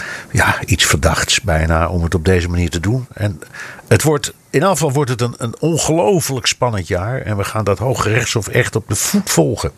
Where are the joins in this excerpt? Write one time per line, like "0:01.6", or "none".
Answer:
0:03.1